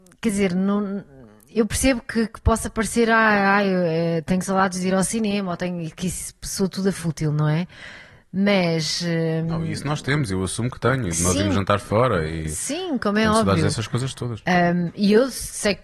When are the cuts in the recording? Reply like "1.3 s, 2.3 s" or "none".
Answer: none